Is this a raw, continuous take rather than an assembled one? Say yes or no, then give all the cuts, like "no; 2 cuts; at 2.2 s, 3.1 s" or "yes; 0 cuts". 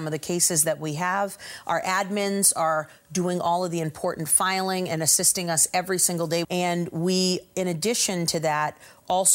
no; 1 cut; at 6.4 s